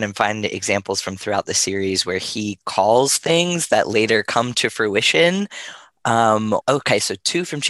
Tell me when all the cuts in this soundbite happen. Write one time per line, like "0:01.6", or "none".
0:06.6